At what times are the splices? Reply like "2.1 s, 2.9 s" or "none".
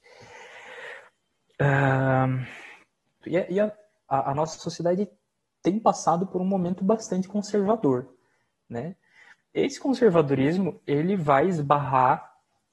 3.2 s